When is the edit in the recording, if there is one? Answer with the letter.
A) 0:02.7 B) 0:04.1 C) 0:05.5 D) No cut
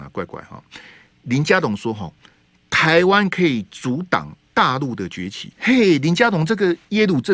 C